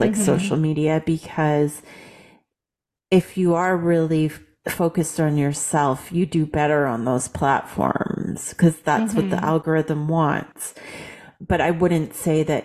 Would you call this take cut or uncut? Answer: uncut